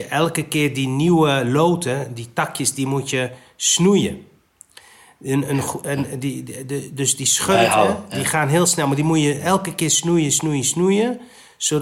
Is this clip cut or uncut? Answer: uncut